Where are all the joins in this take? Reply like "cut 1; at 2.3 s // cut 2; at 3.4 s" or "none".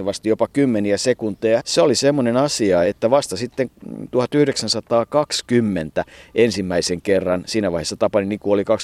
cut 1; at 1.6 s // cut 2; at 2.8 s

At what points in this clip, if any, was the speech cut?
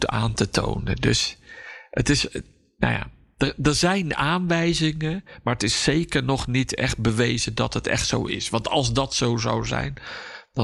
none

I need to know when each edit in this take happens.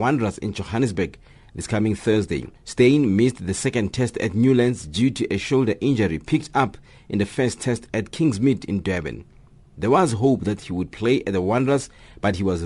cut 1; at 2.6 s

